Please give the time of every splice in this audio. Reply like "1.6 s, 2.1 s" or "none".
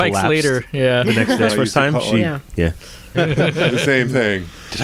1.5 s, 3.1 s